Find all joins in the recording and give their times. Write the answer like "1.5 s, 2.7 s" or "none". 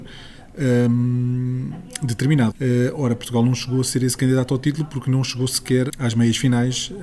2.5 s, 5.9 s